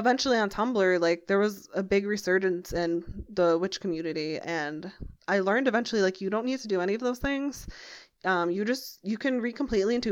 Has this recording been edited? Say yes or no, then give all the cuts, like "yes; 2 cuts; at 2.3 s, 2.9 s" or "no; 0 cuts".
no; 0 cuts